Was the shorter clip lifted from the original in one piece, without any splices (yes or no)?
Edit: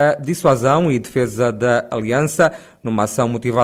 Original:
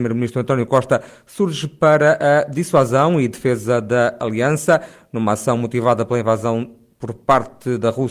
yes